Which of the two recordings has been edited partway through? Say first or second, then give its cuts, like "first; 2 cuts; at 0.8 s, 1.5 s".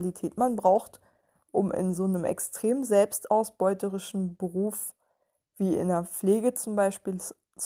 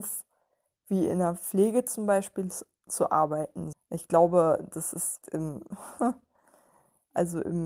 second; 2 cuts; at 3.7 s, 5.2 s